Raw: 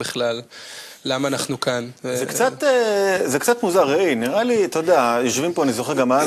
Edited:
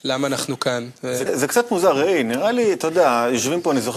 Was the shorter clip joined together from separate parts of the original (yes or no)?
yes